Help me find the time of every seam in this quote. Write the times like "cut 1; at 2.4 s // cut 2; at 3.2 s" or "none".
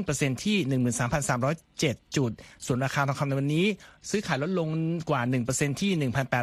cut 1; at 2.1 s